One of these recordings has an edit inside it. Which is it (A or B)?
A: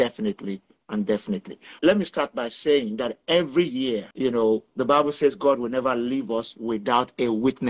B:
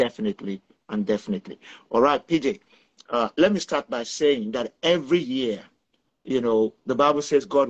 A